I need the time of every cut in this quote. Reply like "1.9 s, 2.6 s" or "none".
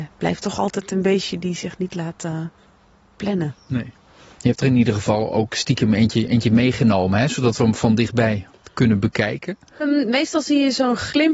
9.8 s